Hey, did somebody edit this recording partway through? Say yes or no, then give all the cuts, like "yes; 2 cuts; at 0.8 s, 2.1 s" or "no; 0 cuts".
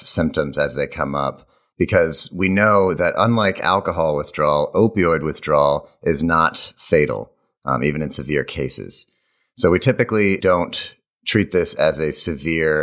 no; 0 cuts